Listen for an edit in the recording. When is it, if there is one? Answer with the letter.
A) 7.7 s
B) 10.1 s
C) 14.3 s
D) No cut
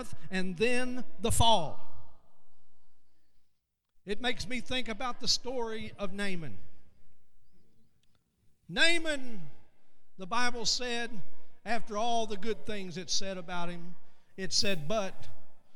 D